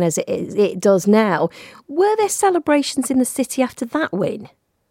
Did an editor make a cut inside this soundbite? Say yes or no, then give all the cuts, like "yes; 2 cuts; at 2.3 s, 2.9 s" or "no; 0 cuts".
no; 0 cuts